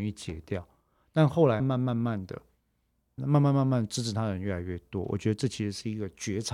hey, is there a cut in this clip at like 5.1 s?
no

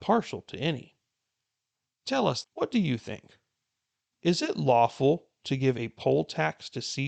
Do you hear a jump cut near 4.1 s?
no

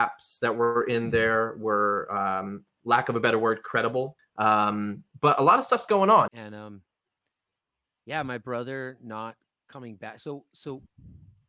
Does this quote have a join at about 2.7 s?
no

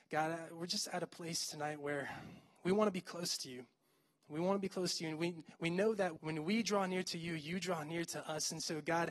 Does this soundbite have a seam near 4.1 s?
no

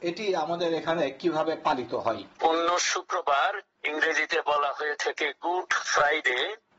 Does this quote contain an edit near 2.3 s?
yes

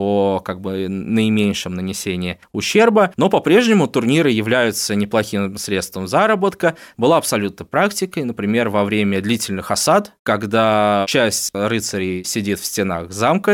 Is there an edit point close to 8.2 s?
no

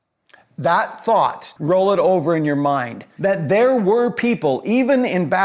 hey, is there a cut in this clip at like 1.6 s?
yes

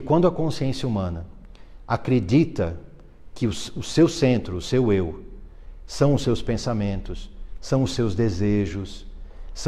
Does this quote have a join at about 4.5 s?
no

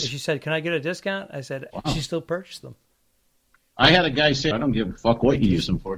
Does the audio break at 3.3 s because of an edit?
no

